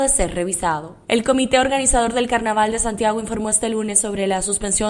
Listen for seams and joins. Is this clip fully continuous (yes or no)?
yes